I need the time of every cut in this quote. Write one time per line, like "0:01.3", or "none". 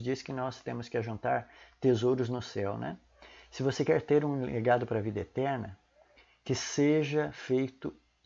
none